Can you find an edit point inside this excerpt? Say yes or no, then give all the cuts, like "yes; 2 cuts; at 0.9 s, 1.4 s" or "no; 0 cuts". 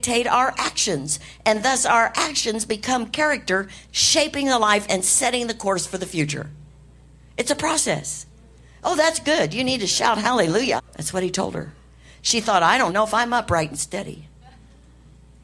yes; 3 cuts; at 3.9 s, 10.8 s, 12.9 s